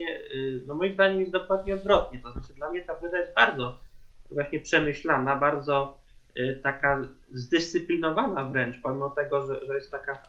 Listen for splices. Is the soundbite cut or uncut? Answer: cut